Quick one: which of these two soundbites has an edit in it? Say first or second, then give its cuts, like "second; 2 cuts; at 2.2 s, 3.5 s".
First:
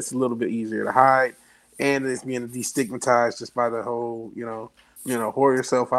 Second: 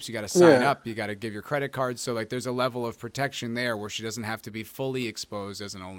first; 1 cut; at 5.0 s